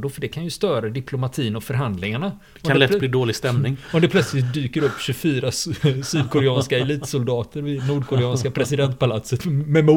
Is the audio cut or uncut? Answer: uncut